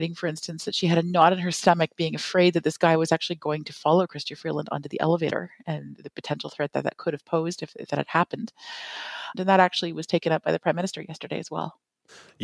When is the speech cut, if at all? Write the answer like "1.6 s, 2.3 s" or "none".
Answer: 9.3 s

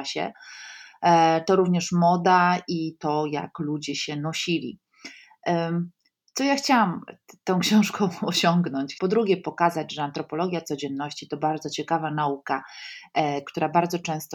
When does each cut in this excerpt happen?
9.0 s, 13.4 s

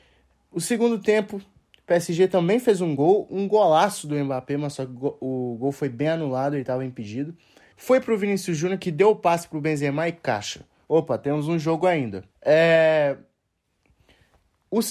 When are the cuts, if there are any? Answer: 7.7 s, 10.8 s, 12.3 s

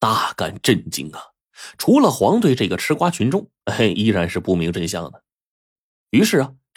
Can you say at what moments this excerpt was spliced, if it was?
none

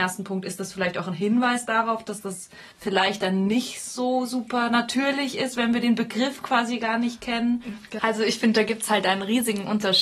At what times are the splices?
2.7 s, 8.0 s

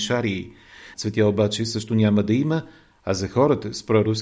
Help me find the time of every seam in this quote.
0.9 s

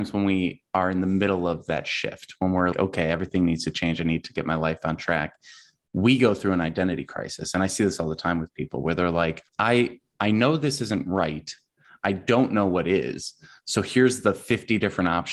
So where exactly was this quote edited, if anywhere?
2.7 s, 9.5 s

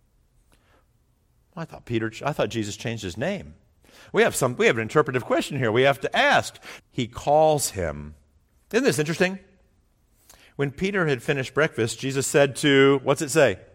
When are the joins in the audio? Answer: 6.8 s

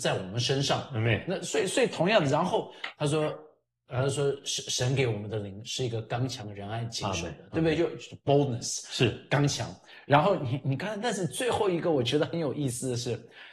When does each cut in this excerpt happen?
none

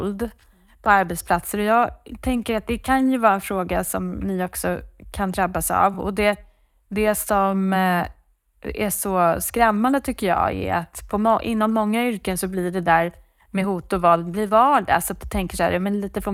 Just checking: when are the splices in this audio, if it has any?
none

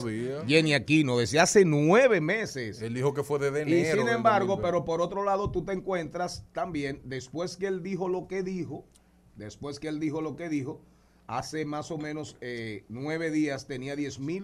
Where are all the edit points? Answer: none

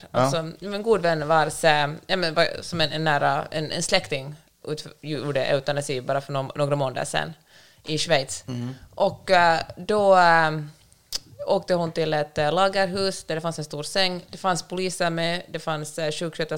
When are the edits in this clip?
none

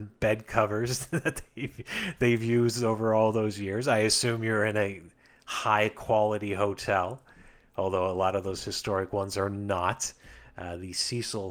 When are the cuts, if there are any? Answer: none

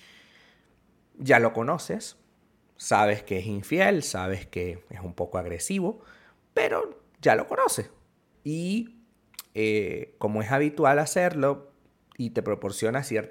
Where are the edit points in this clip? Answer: 8.3 s

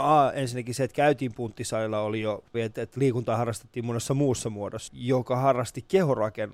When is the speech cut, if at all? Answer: 2.5 s, 4.9 s

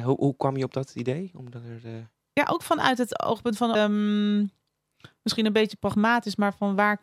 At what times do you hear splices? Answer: 3.8 s

